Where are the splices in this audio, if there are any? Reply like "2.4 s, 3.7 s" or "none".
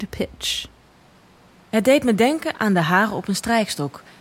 none